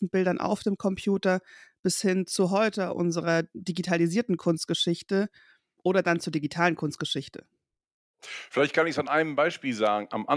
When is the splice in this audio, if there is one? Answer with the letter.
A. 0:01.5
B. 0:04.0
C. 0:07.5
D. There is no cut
D